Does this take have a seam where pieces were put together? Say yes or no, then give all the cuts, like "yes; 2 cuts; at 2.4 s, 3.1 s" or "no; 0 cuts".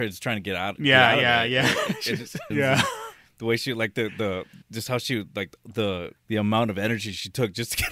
yes; 3 cuts; at 2.5 s, 4.6 s, 6.2 s